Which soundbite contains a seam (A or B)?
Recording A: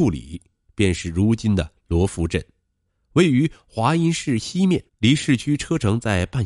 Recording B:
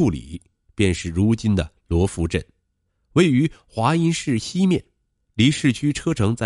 A